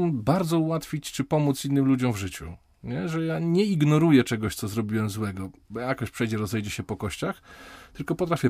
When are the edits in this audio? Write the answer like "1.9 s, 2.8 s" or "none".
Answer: none